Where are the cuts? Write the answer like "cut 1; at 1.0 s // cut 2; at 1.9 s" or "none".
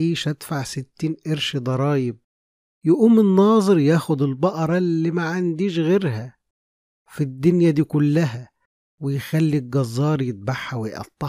none